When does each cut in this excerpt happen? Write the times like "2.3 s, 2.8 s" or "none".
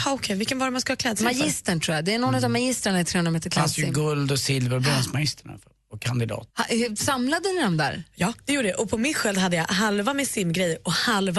6.5 s